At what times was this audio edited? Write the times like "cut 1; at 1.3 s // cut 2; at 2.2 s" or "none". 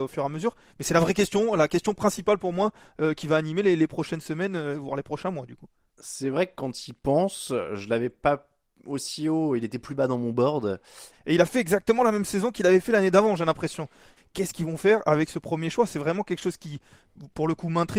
cut 1; at 11.1 s // cut 2; at 14.2 s